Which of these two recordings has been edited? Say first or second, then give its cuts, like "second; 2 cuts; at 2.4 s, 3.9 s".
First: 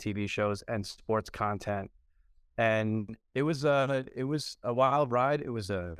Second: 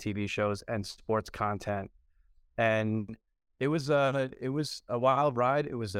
first; 1 cut; at 3.2 s